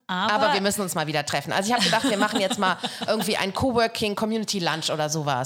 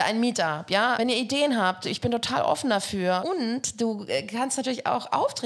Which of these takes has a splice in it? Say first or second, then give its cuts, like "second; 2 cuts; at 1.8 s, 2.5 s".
second; 2 cuts; at 0.9 s, 3.2 s